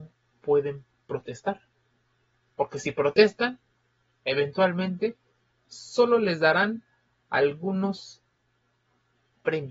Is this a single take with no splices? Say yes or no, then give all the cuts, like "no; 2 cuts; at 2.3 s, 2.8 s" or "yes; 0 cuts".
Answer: yes; 0 cuts